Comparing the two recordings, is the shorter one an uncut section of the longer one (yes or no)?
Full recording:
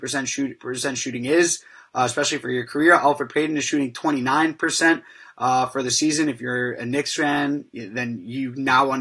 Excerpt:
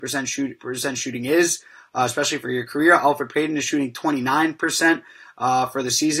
yes